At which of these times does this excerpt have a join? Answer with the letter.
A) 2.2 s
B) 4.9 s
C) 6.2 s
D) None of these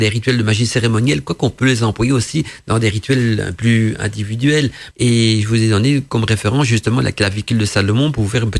B